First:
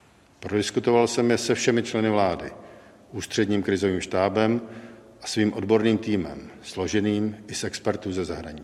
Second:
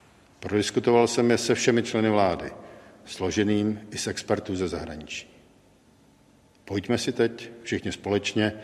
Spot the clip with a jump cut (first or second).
second